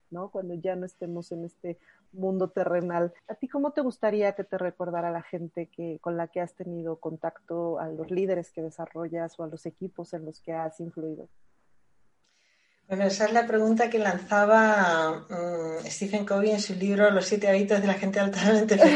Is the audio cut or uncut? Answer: cut